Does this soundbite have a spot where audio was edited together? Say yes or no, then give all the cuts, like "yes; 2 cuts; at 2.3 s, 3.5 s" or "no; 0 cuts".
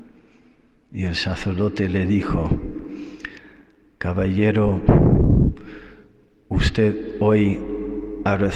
no; 0 cuts